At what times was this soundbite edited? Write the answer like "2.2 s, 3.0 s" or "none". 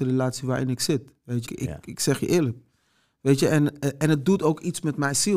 1.5 s